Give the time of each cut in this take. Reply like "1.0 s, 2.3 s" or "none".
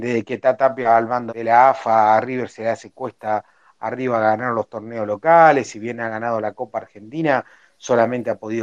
1.3 s